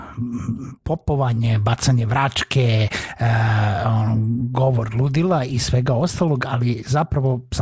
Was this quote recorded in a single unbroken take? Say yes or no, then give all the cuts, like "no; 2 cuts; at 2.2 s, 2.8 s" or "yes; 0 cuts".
yes; 0 cuts